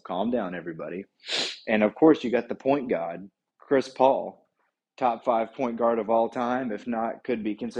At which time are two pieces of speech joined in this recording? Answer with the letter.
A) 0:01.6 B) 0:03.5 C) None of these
B